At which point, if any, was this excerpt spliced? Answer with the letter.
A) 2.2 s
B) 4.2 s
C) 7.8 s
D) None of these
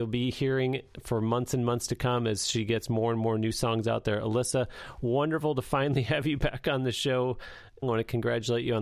C